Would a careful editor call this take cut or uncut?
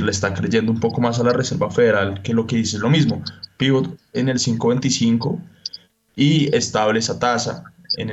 uncut